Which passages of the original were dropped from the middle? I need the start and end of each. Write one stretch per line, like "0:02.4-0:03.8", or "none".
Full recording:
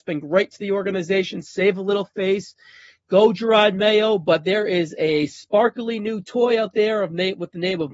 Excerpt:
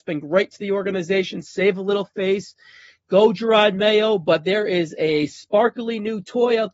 none